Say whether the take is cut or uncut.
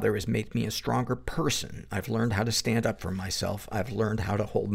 uncut